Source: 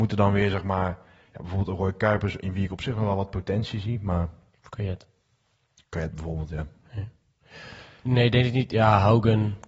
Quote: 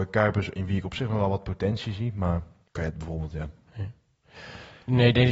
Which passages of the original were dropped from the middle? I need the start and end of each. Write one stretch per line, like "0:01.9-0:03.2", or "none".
0:04.5-0:05.8